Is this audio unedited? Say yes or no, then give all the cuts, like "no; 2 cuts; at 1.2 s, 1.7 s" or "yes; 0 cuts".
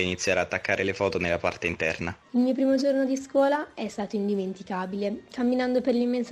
no; 1 cut; at 2.2 s